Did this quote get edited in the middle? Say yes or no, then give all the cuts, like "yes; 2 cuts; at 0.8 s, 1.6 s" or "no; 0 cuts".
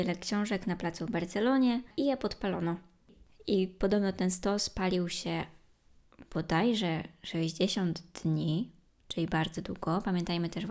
no; 0 cuts